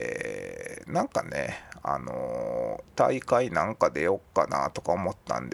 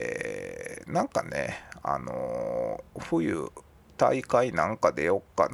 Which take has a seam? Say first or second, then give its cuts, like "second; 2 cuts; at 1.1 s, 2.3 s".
first; 1 cut; at 2.8 s